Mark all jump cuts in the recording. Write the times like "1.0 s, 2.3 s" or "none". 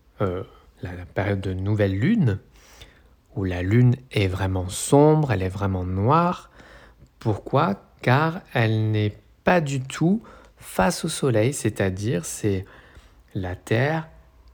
none